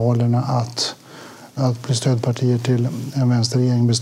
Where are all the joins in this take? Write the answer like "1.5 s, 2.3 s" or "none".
1.6 s

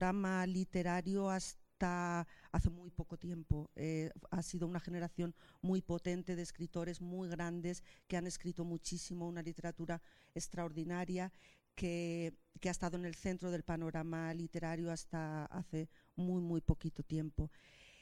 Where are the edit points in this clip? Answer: none

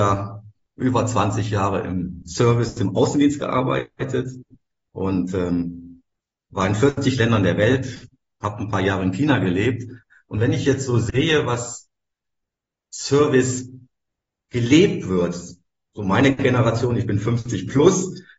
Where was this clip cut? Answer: none

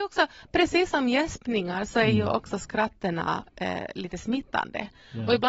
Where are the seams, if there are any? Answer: none

